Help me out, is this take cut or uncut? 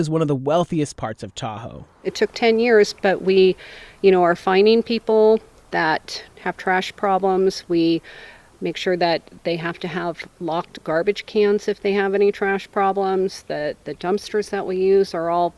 uncut